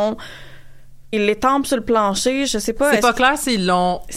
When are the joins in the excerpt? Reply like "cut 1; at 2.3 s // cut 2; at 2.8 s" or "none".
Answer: cut 1; at 1.1 s